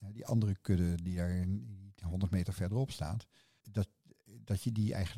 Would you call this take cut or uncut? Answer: cut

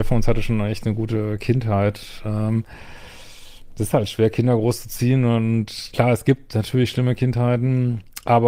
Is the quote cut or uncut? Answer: uncut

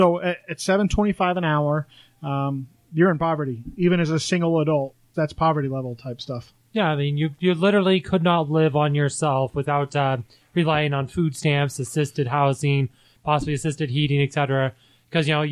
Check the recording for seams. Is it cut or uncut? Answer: cut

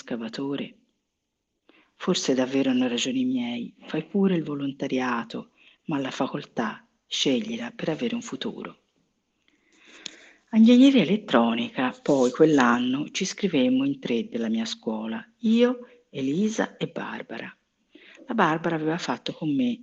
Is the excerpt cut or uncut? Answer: uncut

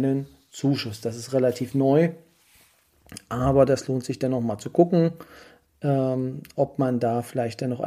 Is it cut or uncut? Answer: uncut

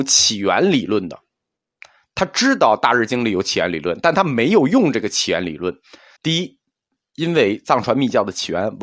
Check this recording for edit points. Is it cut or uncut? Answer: cut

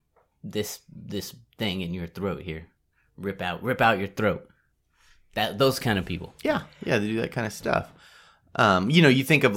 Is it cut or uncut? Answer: uncut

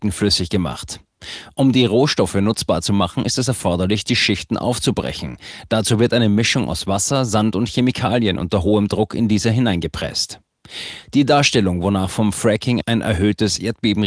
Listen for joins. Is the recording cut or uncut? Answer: uncut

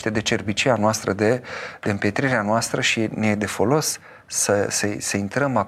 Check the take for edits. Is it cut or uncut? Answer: uncut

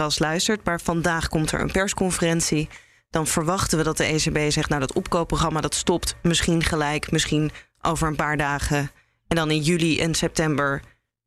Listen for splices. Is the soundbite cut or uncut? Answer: uncut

